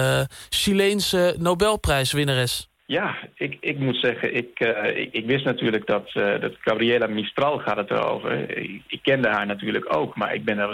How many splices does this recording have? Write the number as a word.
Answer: one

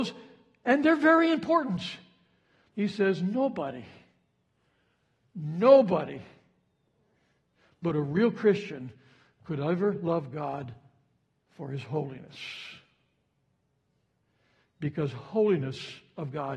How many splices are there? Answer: one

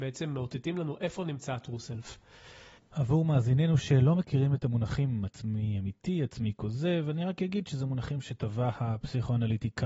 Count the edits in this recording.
one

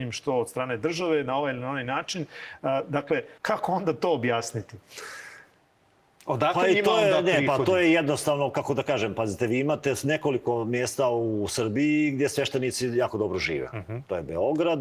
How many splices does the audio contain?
one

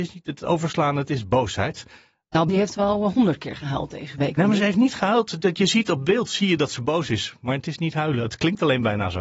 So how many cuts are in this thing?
one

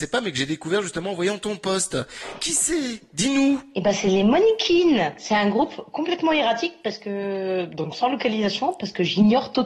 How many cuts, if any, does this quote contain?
zero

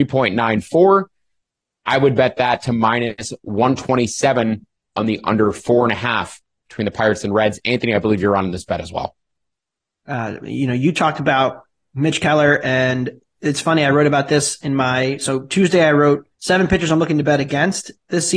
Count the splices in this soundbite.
two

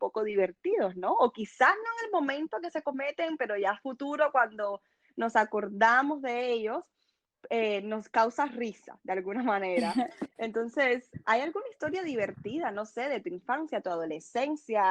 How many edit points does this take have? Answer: zero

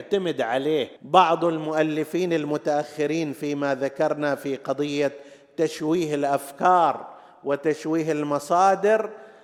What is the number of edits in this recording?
one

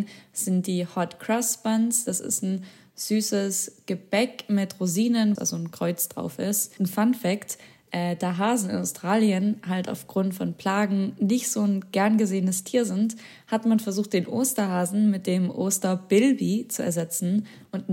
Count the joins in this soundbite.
one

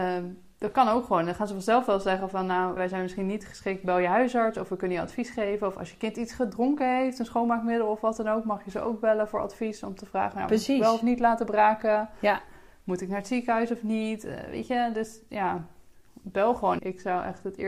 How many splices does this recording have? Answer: two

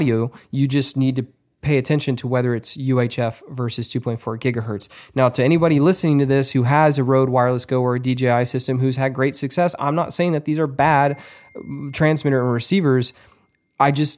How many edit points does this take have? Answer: zero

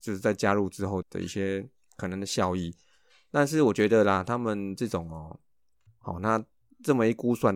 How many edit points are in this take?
two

